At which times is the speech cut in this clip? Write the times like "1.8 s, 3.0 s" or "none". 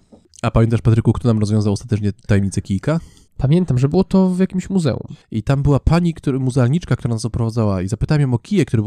5.2 s